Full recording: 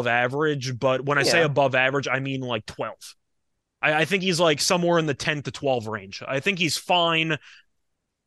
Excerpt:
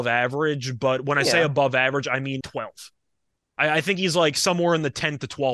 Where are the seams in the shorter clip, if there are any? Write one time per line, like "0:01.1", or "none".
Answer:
0:02.4

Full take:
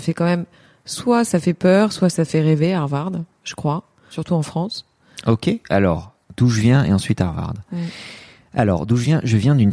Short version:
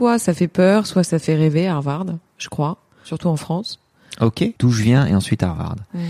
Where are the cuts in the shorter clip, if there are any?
0:04.6

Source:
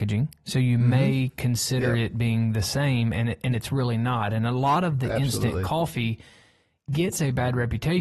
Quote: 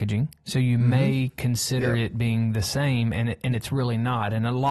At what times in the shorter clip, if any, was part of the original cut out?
none

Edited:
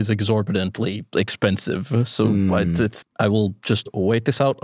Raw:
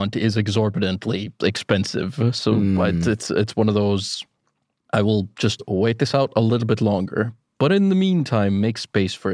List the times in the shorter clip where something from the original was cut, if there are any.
0:03.0

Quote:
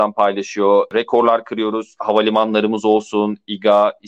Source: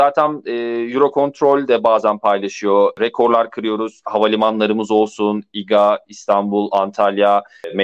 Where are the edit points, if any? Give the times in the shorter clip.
none

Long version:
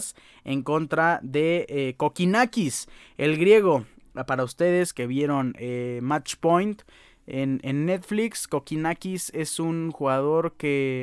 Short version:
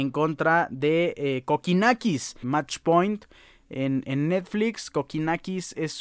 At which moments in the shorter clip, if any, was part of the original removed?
0:02.4

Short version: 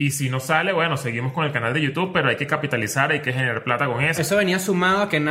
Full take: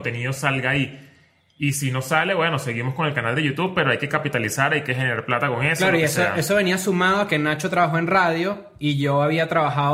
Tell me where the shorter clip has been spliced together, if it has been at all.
0:04.2

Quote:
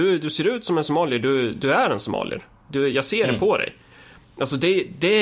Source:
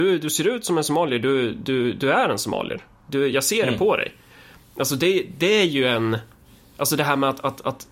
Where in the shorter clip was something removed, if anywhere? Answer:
0:01.5

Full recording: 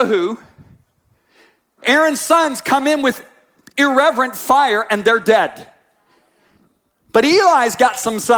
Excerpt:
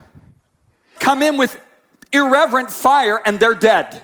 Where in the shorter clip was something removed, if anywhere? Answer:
0:01.0

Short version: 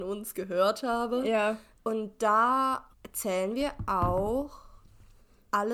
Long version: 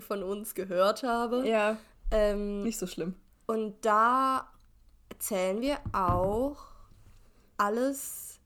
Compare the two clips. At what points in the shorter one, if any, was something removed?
0:01.8
0:02.9

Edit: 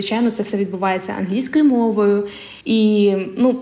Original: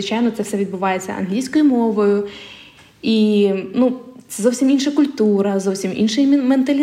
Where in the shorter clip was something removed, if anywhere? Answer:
0:02.6

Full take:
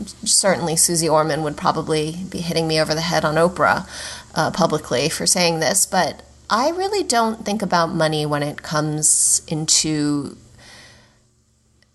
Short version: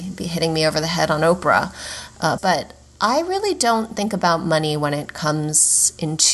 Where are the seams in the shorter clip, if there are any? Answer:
0:02.4

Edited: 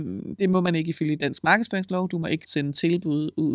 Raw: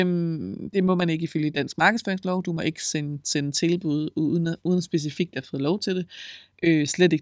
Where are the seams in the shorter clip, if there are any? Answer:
0:02.4

